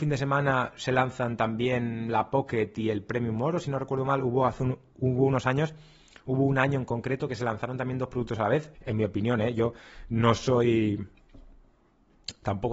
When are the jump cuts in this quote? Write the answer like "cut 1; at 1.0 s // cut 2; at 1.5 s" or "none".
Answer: cut 1; at 8.7 s